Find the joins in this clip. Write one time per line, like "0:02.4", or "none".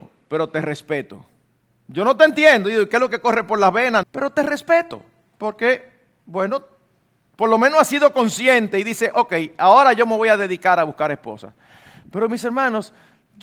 0:04.0